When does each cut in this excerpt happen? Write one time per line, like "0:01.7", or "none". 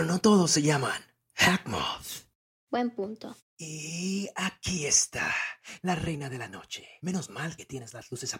none